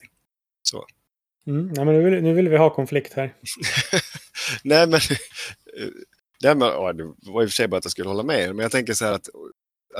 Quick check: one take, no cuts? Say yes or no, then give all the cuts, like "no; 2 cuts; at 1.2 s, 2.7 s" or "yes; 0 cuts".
yes; 0 cuts